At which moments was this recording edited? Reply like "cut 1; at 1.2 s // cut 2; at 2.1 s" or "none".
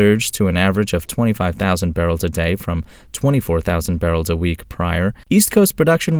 cut 1; at 5.2 s